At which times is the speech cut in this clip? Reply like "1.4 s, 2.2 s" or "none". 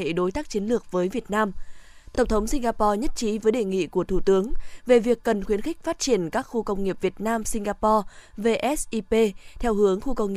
none